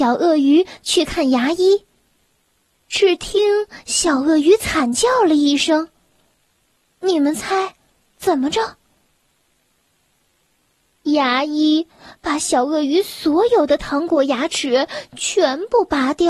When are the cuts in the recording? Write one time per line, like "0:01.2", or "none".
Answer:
0:02.8